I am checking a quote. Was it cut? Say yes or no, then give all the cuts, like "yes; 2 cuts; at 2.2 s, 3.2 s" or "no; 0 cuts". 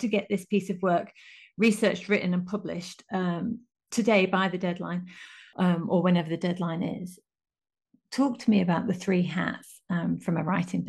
no; 0 cuts